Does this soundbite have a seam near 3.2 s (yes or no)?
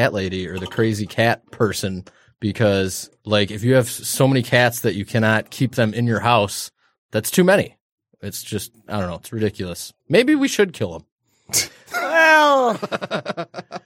yes